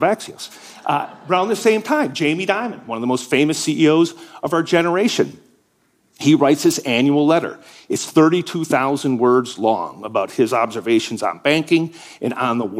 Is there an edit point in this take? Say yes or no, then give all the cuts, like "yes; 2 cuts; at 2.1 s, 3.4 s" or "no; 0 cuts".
no; 0 cuts